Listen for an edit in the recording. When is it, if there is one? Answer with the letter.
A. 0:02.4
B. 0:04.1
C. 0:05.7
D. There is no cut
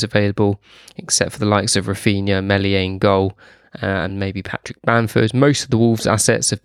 D